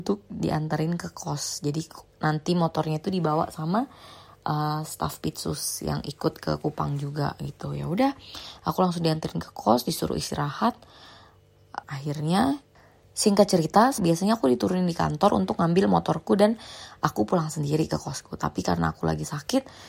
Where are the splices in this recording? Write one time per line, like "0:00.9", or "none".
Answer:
0:11.8
0:14.0

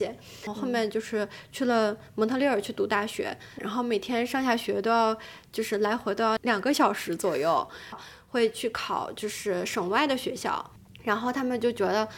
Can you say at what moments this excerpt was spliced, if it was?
0:03.6
0:06.4
0:07.9

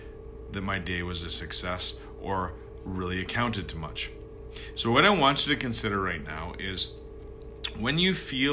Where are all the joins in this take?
none

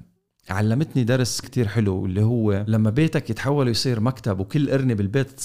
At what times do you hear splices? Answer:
0:01.4

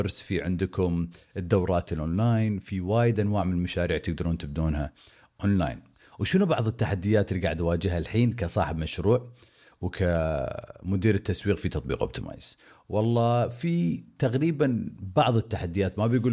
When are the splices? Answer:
none

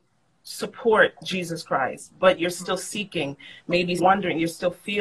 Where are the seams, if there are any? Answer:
0:04.0

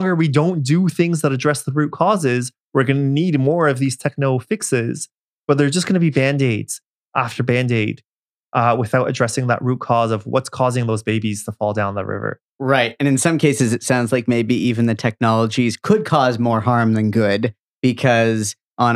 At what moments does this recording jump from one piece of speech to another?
none

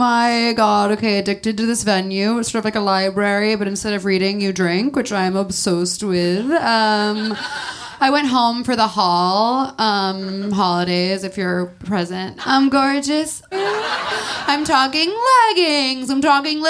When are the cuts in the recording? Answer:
0:12.4
0:13.5

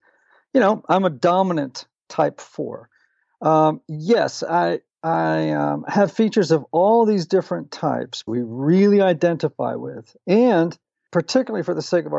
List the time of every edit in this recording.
0:08.3

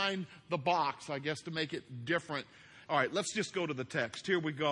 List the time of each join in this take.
0:02.9

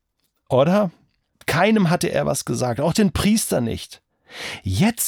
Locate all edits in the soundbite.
0:01.3

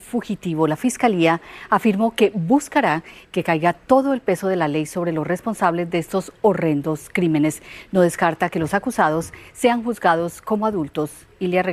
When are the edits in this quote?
none

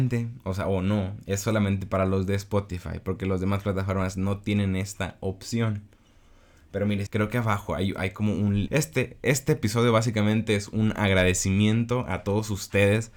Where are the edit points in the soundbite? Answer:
0:07.1
0:08.7

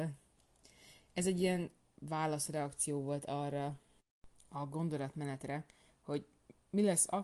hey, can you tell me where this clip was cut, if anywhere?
none

